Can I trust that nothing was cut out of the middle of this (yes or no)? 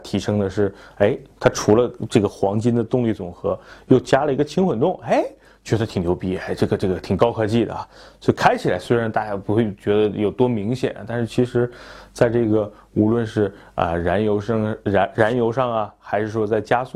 yes